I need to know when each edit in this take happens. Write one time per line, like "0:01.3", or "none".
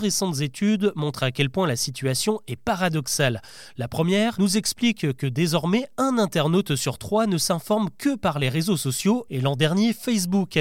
0:04.3
0:09.3